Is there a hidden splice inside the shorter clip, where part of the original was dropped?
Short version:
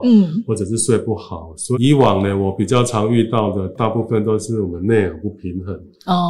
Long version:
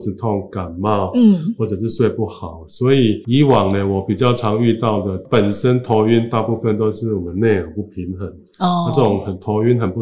yes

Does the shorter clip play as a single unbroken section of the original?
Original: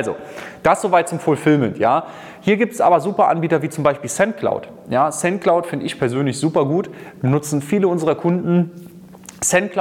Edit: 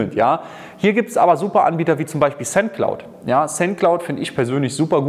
yes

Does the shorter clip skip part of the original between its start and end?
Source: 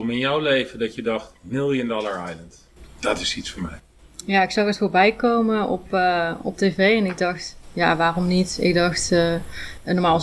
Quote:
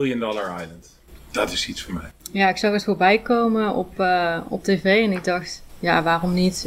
yes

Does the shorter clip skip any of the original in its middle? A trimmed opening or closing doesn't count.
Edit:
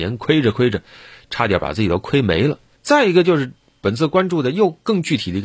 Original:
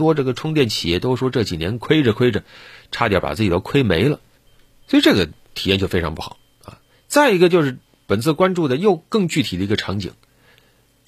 yes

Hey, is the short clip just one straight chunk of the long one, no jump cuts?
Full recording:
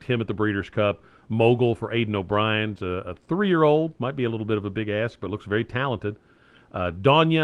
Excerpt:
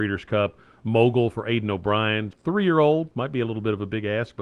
no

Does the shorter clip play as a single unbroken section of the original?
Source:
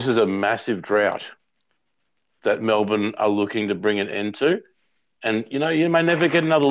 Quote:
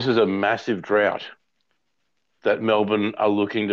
yes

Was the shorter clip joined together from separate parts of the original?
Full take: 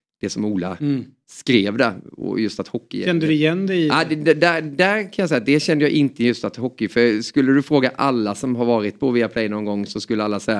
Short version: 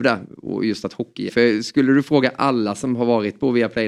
yes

